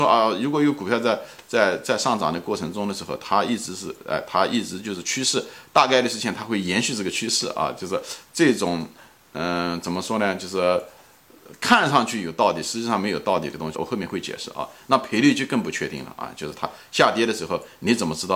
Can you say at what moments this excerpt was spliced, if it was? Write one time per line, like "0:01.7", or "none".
0:13.7